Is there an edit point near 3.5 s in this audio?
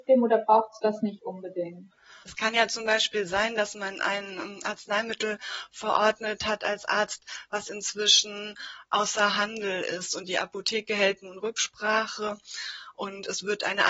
no; 1 cut; at 2.2 s

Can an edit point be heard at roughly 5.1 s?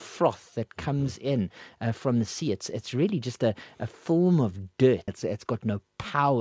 yes; 1 cut; at 5.1 s

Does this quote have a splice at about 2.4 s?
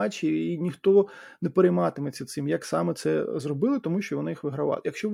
no; 0 cuts

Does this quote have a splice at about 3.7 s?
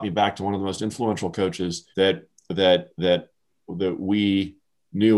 no; 1 cut; at 1.9 s

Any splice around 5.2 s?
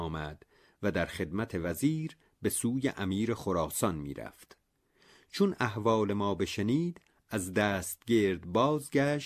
no; 0 cuts

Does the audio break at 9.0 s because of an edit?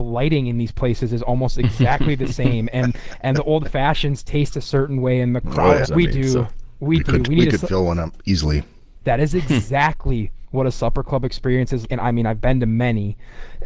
yes; 3 cuts; at 5.8 s, 9.0 s, 11.8 s

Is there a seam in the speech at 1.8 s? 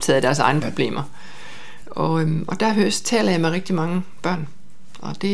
yes; 1 cut; at 1.8 s

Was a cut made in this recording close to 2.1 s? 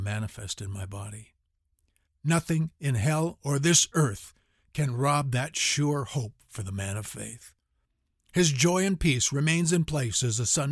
yes; 1 cut; at 2.1 s

